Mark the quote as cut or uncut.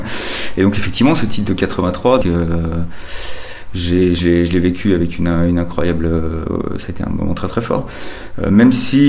cut